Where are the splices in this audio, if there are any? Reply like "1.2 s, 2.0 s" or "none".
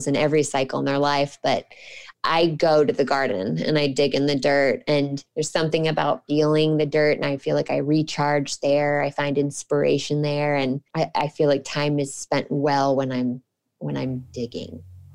5.3 s, 10.9 s